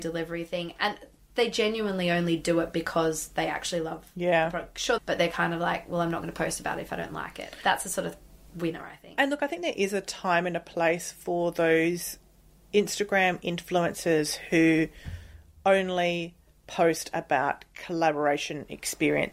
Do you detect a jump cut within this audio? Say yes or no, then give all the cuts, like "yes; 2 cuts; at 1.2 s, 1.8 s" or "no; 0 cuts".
yes; 1 cut; at 5.0 s